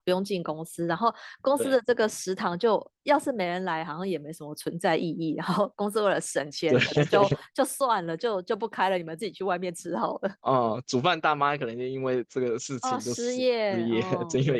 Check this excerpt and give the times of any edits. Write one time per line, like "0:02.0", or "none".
none